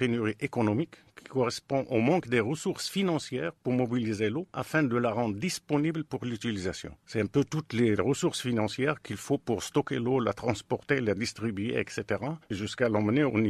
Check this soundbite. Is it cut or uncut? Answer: uncut